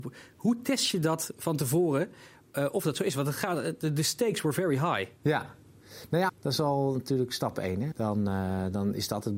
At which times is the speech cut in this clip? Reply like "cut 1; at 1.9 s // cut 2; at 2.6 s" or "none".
cut 1; at 5.2 s // cut 2; at 6.3 s // cut 3; at 7.9 s